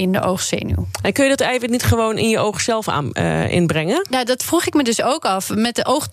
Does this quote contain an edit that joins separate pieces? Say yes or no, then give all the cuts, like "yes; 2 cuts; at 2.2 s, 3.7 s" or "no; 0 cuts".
no; 0 cuts